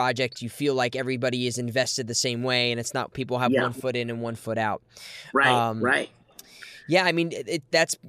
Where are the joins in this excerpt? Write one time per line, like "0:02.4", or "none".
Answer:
none